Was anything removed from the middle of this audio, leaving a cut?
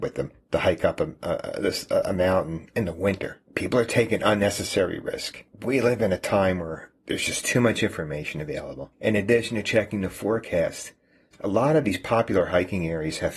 no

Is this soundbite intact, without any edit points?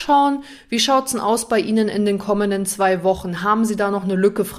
yes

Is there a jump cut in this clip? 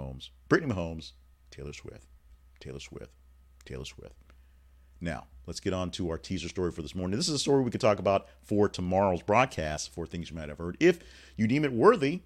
no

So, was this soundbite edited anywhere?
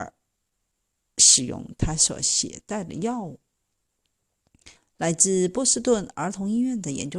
yes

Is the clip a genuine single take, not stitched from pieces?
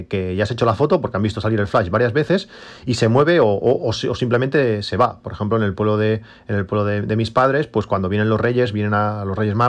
yes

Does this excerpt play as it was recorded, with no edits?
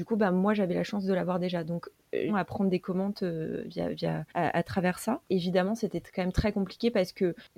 no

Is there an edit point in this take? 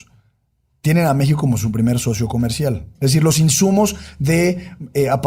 yes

